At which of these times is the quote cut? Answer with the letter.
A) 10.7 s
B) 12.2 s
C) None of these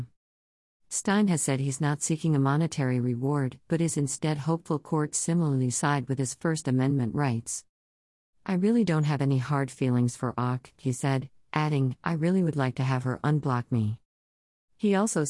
C